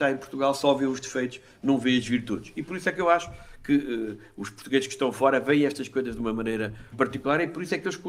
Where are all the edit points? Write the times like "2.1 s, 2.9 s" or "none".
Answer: 6.9 s